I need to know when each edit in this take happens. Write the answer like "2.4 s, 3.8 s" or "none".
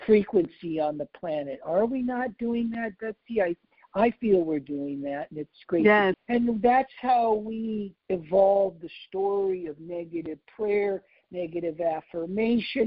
6.1 s, 8.0 s

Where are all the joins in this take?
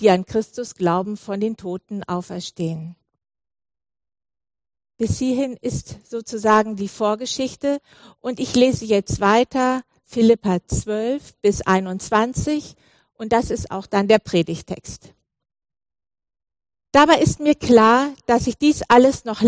none

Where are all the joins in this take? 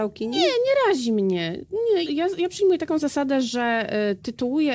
2.1 s

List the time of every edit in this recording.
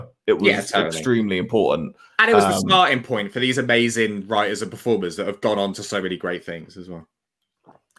none

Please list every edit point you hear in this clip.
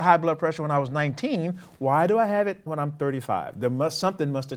2.7 s

